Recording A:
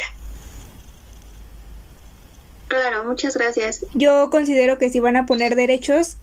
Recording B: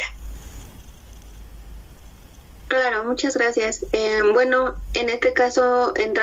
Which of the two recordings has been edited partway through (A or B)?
A